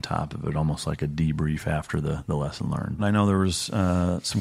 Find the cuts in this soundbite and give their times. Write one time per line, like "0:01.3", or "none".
0:03.0